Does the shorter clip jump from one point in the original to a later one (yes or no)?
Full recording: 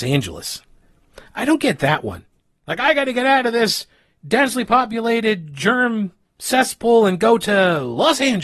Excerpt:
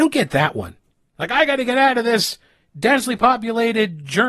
no